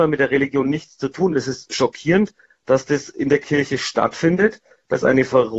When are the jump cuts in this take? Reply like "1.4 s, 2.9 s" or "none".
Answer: none